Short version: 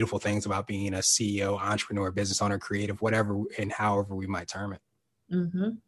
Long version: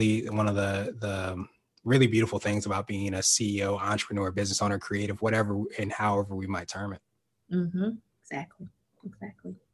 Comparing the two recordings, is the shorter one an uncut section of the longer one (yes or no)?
yes